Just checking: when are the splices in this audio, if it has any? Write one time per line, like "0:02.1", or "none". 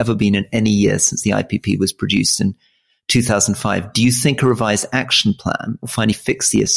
0:05.8

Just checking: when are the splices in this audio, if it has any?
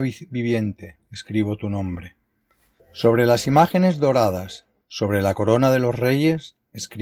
0:02.8
0:04.8

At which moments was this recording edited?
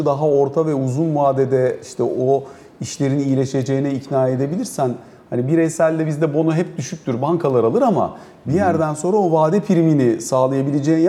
none

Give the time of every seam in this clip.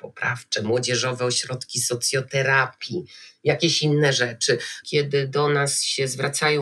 0:04.8

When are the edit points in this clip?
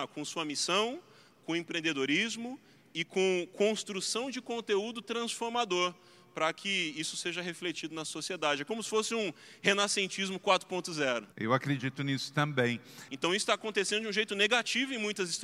0:11.3
0:13.1

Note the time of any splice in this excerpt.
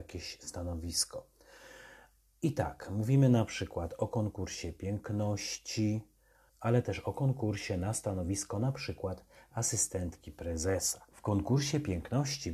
0:06.5
0:11.1

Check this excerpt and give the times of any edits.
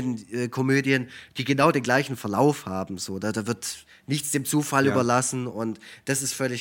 none

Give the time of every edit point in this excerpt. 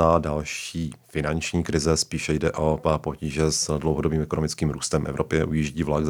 none

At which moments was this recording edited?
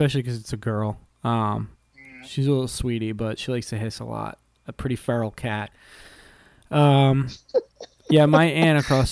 none

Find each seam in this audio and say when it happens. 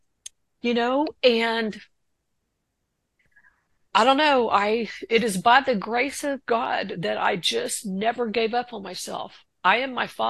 none

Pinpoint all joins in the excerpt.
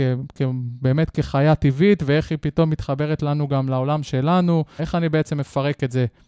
0:04.8

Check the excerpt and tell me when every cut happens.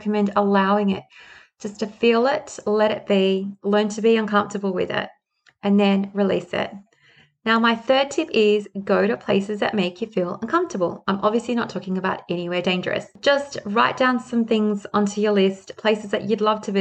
none

